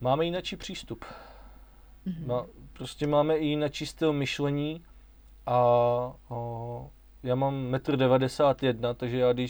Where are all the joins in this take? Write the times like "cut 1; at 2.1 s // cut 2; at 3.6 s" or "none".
none